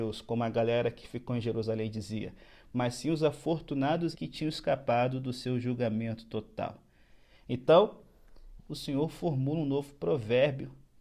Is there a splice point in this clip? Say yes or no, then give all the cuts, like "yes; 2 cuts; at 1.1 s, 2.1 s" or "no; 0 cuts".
yes; 2 cuts; at 4.1 s, 8.6 s